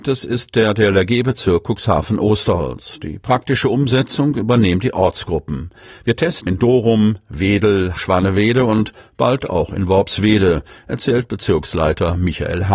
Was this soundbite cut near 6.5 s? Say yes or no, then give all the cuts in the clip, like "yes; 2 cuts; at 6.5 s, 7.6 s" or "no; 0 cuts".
yes; 2 cuts; at 6.5 s, 8.0 s